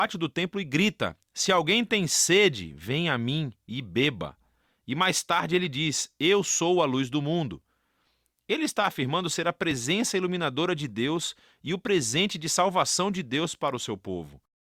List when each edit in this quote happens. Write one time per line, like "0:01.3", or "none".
none